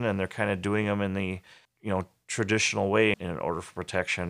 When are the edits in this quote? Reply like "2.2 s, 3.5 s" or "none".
1.6 s, 3.1 s